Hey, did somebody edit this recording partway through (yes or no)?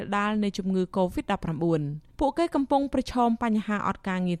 yes